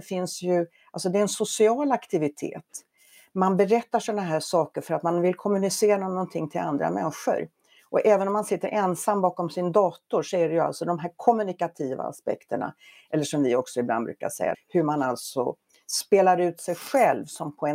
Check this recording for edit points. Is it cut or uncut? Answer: cut